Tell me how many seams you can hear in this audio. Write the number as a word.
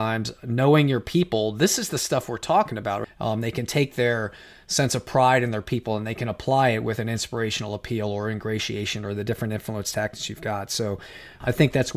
one